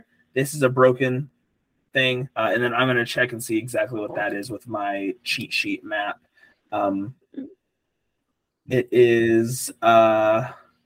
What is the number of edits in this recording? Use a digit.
1